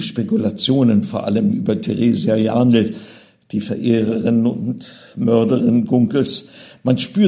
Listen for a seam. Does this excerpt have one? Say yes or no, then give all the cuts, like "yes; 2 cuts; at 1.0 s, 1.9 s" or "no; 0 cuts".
no; 0 cuts